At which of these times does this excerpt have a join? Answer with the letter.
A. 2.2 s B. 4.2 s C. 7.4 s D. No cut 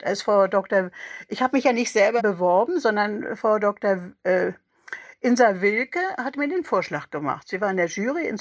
A